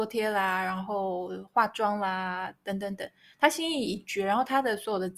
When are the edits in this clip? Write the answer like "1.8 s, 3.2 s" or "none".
none